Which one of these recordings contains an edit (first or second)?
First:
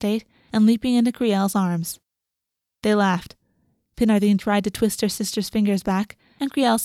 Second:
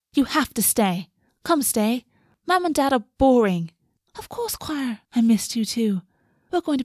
second